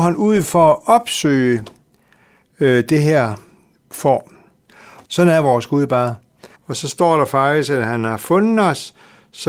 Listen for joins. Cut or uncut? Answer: cut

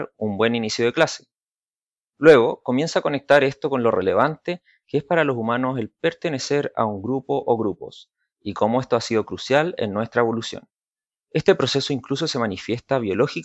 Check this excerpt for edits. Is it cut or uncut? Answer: uncut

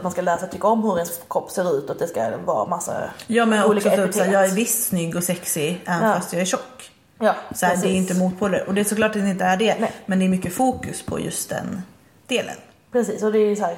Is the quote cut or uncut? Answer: uncut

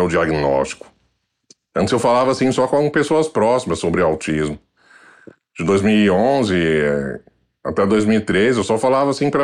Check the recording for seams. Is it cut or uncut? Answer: uncut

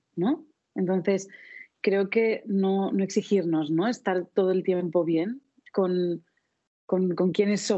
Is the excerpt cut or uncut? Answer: uncut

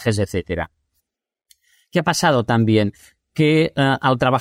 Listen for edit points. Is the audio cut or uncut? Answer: uncut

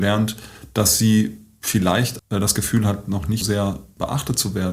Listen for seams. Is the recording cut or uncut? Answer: cut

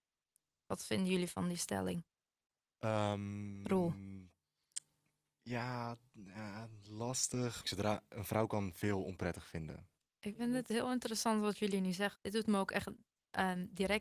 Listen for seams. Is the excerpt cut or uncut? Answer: cut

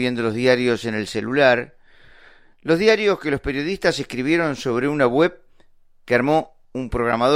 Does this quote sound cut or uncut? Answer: uncut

